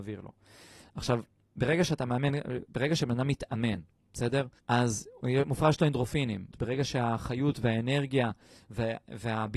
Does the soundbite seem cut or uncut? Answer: cut